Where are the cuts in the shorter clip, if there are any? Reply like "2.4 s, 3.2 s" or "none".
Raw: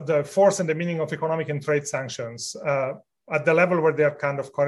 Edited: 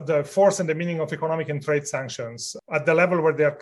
2.6 s